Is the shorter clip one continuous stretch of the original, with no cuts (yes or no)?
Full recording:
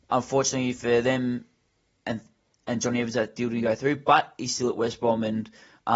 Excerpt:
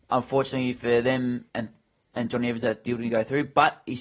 no